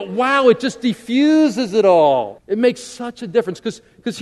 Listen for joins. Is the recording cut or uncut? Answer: cut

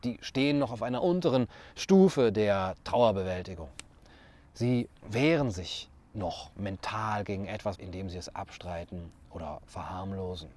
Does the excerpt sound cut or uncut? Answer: cut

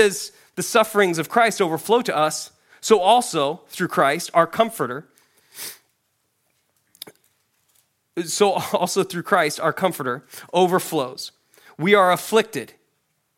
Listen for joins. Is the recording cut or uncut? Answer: uncut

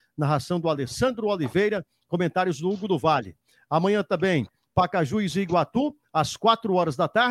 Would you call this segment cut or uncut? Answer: uncut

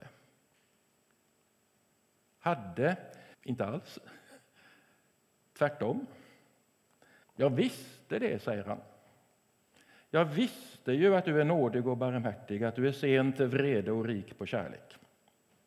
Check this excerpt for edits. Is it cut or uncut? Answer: cut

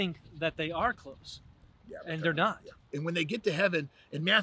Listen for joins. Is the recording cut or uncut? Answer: cut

